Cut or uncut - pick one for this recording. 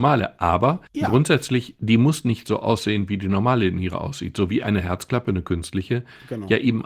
uncut